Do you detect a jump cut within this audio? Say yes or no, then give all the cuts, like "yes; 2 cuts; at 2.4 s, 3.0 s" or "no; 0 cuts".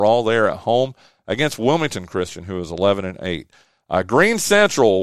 no; 0 cuts